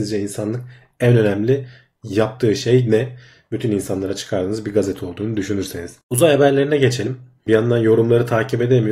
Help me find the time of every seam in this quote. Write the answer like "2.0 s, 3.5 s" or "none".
6.0 s, 7.5 s

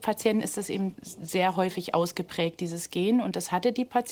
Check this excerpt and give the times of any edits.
0.9 s

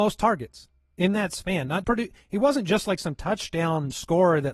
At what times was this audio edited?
1.8 s

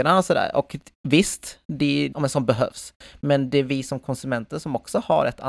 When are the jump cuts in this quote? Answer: 2.1 s

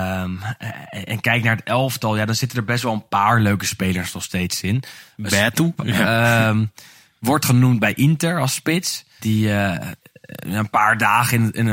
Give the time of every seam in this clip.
5.8 s, 9.2 s

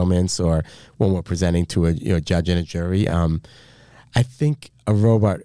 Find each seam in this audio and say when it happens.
none

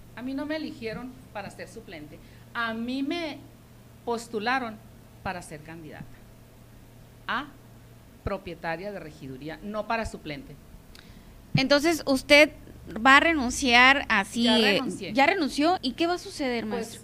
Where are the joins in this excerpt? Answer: 15.8 s

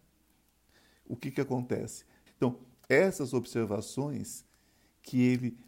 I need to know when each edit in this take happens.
2.3 s

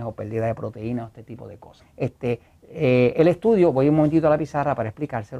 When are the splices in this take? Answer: 1.8 s

